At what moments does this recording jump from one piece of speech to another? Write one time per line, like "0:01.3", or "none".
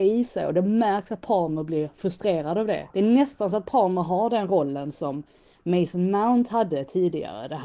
0:02.9